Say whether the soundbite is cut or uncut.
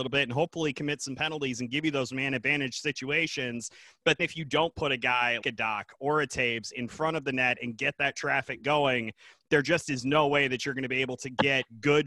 cut